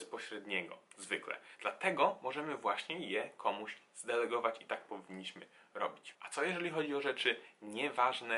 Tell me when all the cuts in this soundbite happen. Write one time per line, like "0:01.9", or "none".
none